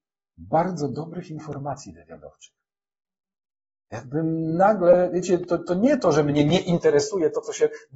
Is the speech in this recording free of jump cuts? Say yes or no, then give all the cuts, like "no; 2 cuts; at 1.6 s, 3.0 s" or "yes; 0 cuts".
yes; 0 cuts